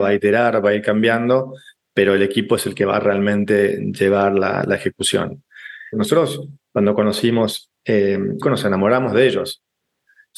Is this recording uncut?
no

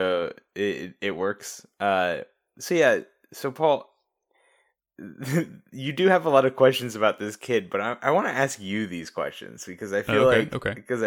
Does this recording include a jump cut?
no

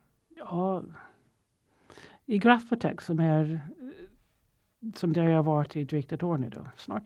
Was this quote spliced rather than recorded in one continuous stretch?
no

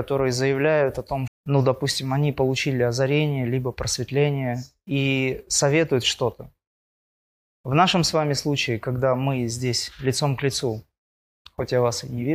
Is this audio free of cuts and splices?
no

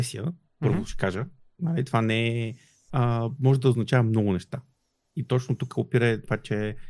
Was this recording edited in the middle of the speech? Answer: yes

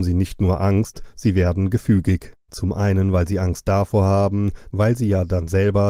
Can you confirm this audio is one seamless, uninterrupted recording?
no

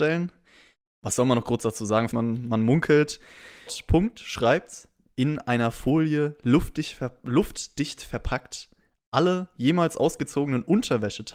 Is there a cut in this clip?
yes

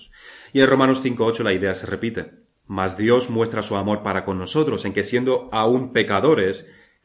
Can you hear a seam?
no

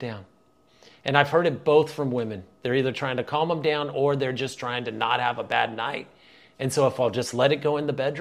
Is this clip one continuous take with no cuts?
yes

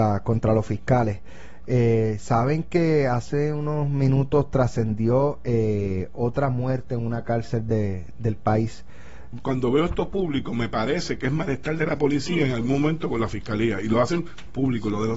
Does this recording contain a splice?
yes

